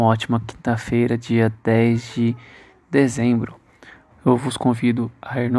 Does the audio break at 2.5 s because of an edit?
no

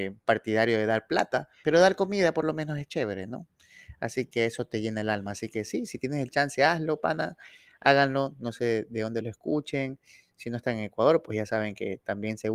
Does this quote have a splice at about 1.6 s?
yes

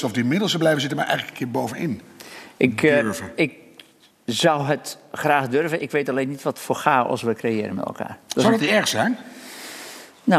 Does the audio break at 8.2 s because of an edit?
no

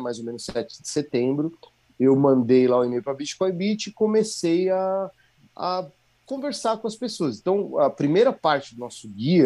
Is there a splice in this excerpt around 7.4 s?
no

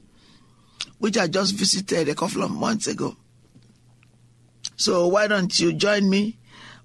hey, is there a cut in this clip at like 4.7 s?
yes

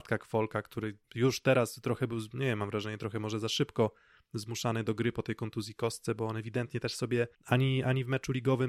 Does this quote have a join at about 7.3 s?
yes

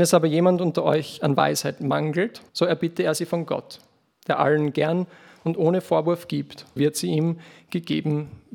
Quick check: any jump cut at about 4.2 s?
no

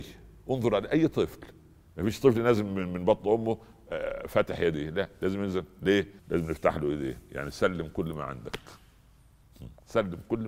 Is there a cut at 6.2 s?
yes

